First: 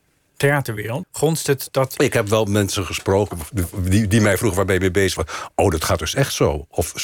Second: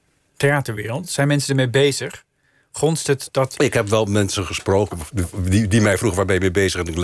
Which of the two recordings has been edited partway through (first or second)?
first